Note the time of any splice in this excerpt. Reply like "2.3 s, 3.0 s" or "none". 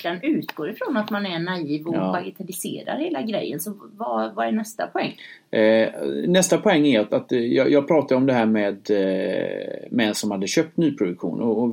none